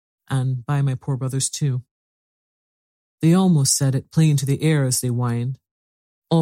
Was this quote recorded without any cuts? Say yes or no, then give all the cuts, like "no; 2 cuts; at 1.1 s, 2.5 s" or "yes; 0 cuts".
yes; 0 cuts